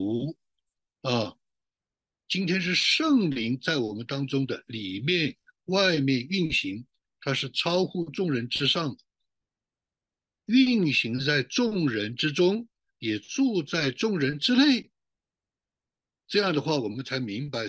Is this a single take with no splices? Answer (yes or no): yes